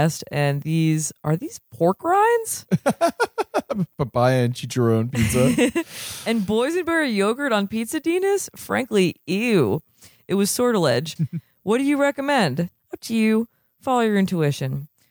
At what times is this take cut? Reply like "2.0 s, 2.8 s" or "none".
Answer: 11.2 s, 12.8 s

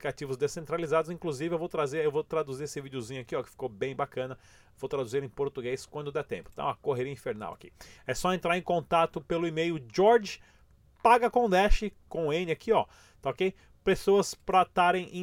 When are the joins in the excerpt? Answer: 8.0 s

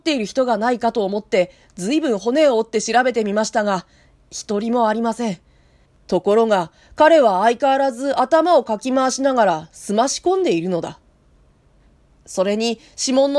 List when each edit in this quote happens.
5.9 s, 12.1 s

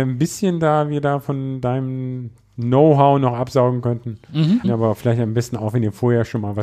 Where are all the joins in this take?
4.6 s

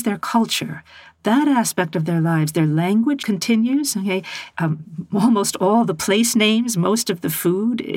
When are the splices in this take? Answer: 3.2 s, 4.5 s

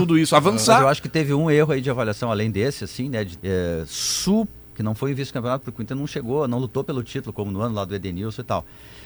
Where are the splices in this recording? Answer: 3.4 s, 4.7 s

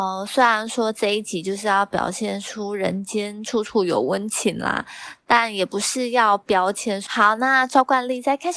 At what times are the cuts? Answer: 7.1 s

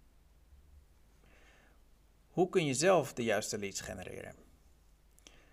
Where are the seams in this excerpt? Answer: none

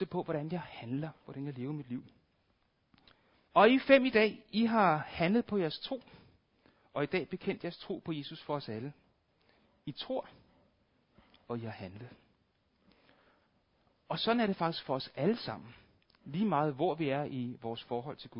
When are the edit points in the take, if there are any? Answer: 3.5 s

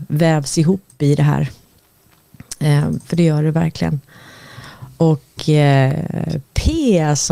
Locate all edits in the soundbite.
none

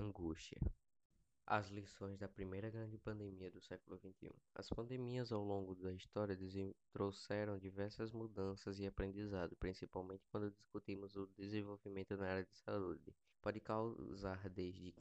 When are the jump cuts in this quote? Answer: 1.3 s, 13.3 s

